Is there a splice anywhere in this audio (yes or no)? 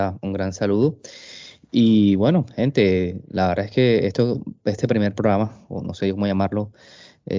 no